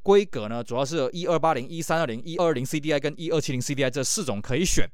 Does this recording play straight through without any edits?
no; 1 cut; at 2.4 s

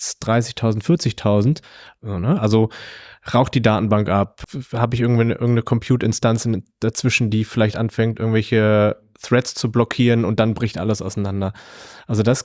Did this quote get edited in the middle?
yes; 1 cut; at 2.0 s

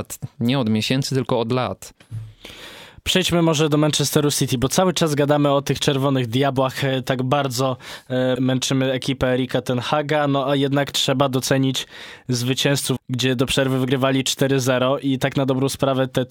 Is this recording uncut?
no; 2 cuts; at 8.4 s, 13.0 s

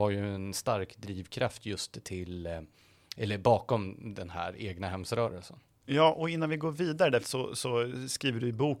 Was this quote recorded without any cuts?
no; 1 cut; at 7.2 s

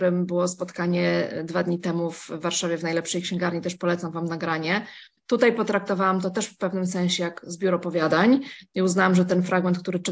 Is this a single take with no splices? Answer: no; 1 cut; at 5.2 s

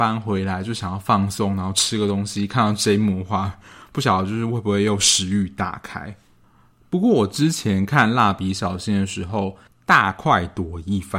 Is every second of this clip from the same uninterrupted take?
no; 1 cut; at 9.6 s

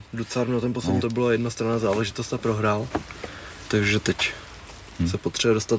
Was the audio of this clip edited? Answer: yes; 1 cut; at 1.0 s

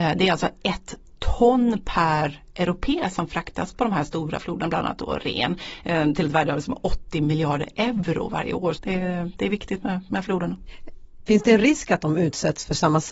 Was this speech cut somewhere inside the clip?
yes; 2 cuts; at 8.8 s, 11.3 s

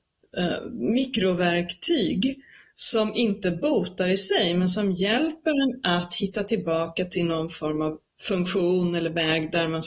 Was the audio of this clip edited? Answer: yes; 1 cut; at 8.1 s

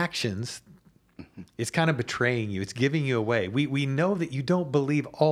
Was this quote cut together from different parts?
no; 0 cuts

